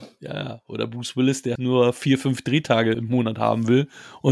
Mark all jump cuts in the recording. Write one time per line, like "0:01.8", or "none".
0:01.6
0:02.9

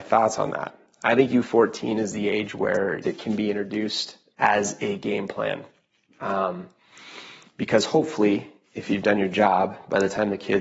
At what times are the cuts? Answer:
0:03.0
0:04.3

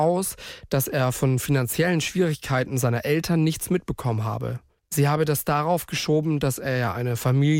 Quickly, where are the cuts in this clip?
0:04.8

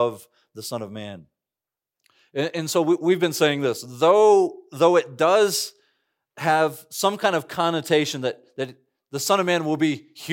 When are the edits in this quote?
none

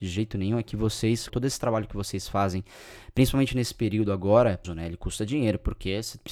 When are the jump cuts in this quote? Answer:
0:01.3
0:04.6

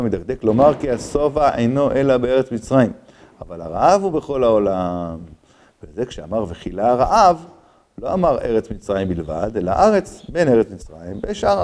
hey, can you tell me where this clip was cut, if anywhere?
none

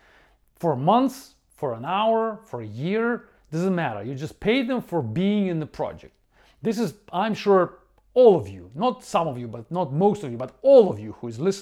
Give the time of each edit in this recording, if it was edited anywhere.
none

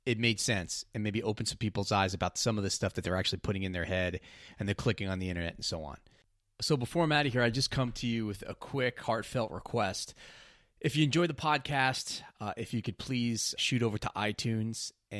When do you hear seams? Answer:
0:13.6

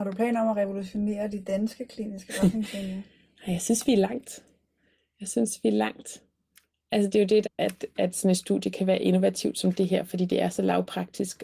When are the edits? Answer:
0:07.4

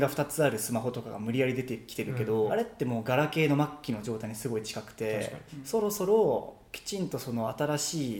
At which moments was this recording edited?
0:02.5
0:05.5

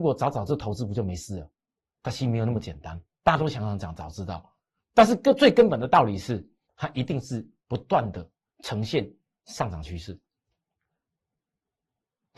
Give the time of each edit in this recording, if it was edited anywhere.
0:06.6

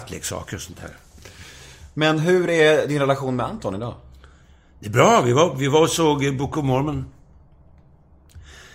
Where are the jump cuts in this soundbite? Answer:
none

